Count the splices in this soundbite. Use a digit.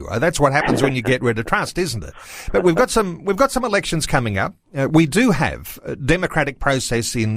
0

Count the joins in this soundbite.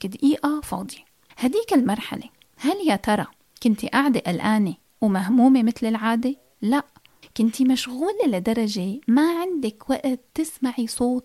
1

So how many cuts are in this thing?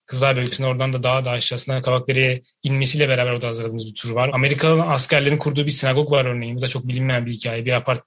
1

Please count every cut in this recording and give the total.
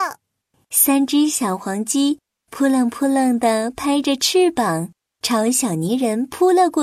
0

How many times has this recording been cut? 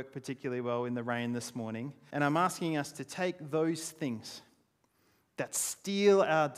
1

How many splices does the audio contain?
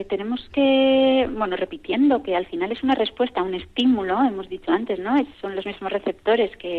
1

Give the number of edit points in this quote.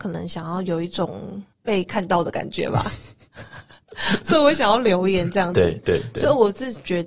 1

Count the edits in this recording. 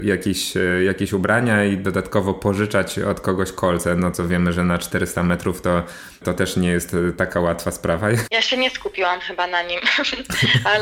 1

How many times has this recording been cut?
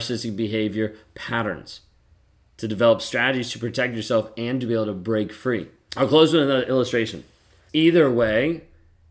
2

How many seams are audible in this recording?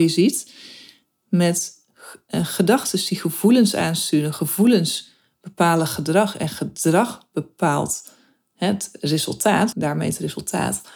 1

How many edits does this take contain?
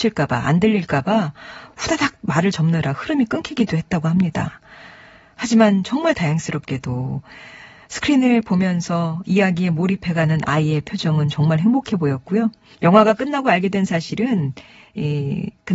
1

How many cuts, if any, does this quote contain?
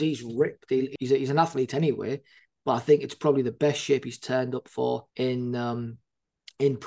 2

